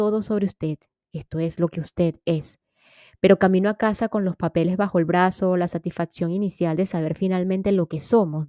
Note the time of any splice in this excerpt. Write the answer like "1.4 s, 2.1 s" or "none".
none

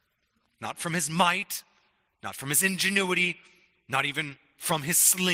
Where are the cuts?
none

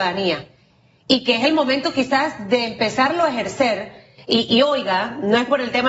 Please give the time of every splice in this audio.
4.5 s

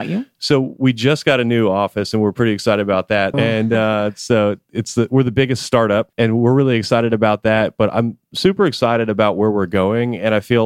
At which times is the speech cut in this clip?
3.3 s, 6.1 s

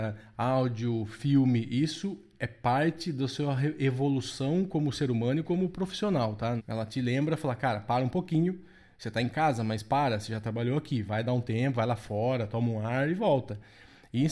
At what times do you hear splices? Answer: 6.6 s

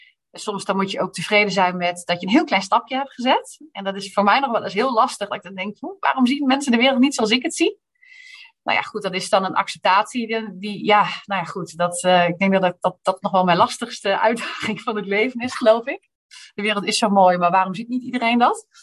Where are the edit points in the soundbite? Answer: none

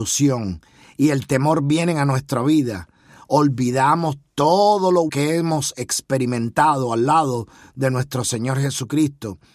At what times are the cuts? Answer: 5.1 s

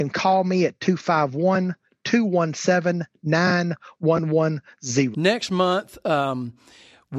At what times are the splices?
5.1 s

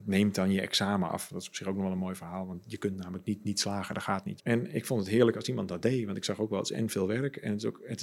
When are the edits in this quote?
4.4 s

